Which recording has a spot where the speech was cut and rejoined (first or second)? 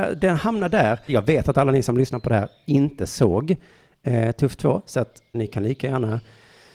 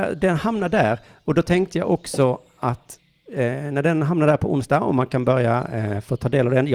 first